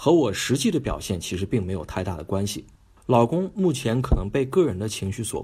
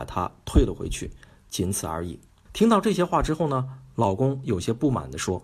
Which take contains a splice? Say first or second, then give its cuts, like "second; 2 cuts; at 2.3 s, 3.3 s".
second; 1 cut; at 2.5 s